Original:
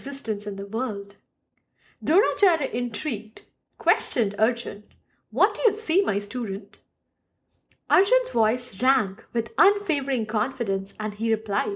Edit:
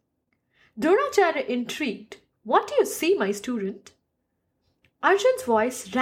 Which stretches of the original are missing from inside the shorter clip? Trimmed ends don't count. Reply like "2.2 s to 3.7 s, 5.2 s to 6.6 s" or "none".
3.6 s to 5.2 s